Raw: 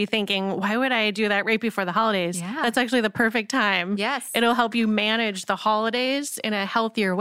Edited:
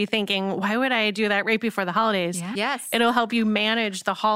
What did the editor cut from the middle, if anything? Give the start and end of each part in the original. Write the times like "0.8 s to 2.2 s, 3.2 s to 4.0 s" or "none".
2.6 s to 4.0 s

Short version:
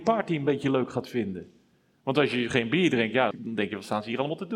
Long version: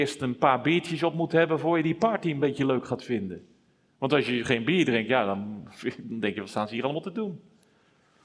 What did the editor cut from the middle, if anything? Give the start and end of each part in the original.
5.3 s to 6.0 s

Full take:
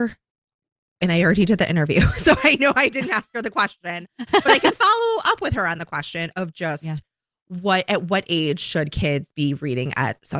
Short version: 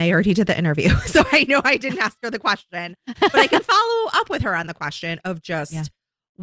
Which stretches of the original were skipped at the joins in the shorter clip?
none

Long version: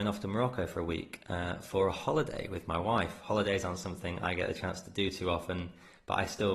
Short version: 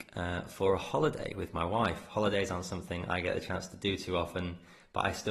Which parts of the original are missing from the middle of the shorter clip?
none

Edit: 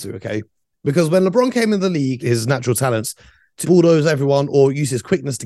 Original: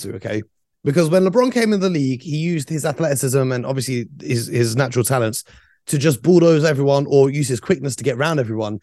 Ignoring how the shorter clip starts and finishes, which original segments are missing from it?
2.2 s to 4.5 s, 5.9 s to 6.2 s

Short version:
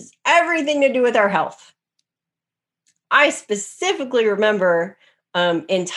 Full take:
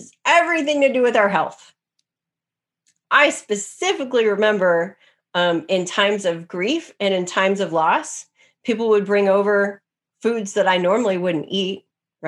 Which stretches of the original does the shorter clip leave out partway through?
none

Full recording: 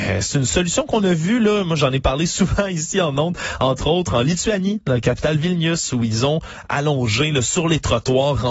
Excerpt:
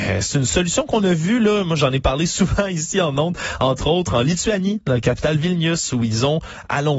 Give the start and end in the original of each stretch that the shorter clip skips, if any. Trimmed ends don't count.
none

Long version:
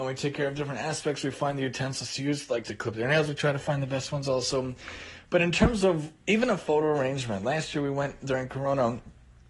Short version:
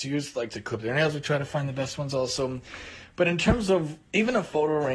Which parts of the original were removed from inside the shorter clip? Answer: none

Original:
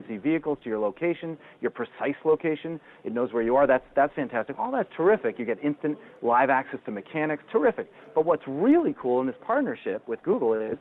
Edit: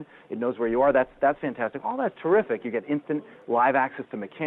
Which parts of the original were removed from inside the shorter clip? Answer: none

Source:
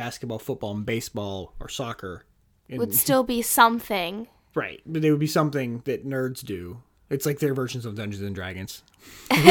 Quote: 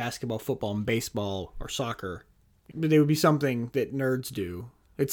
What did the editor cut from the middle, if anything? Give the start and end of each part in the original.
2.7 s to 4.8 s

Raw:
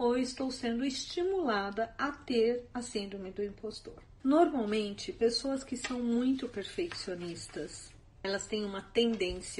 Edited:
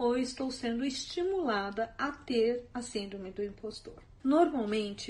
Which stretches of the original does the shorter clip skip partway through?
none

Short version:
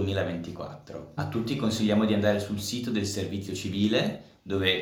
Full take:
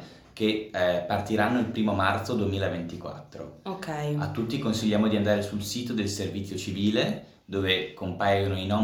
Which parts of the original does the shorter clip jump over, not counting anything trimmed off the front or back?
3.6 s to 4.2 s

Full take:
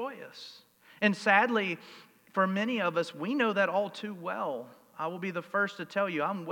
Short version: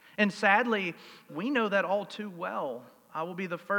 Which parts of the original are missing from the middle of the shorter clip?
2.1 s to 3.1 s

